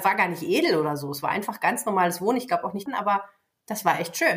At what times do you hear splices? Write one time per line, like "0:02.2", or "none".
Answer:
0:02.9